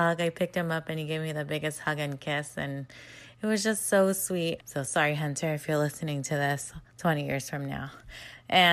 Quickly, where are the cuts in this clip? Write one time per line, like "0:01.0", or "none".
0:04.6
0:06.9

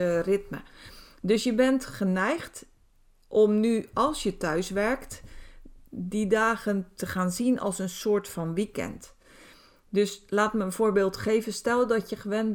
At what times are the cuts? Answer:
none

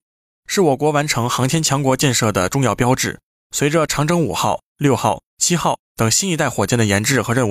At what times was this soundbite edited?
0:03.4

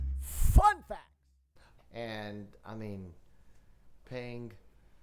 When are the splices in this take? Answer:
0:01.8
0:04.0

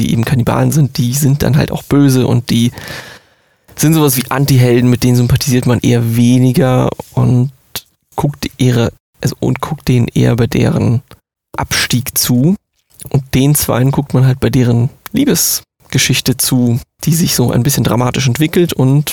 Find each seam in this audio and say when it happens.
none

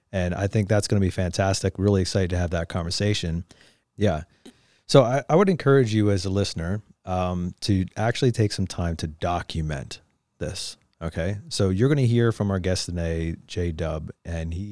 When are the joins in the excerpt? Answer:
0:03.8

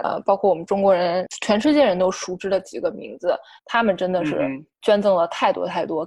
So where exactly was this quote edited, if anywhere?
0:03.6

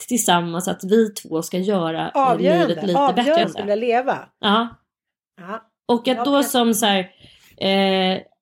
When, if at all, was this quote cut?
0:03.4

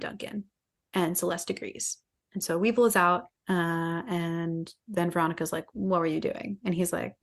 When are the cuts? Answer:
0:03.3
0:04.8

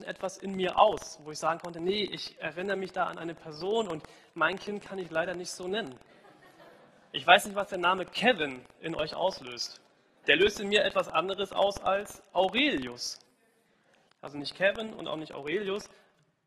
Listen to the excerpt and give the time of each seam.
0:10.2
0:14.1

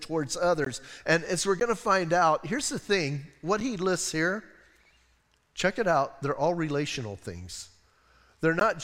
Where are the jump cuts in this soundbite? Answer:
0:01.0

